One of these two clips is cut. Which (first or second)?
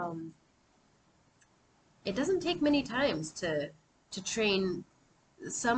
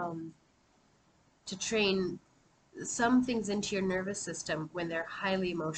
second